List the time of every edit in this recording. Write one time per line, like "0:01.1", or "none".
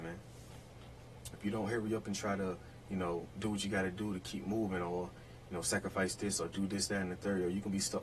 0:01.3